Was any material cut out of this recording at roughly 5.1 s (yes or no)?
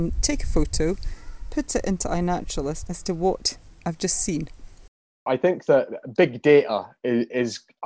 no